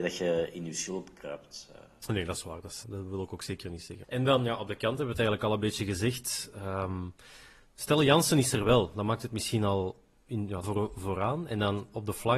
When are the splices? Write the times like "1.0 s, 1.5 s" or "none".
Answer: 2.8 s, 4.0 s, 10.6 s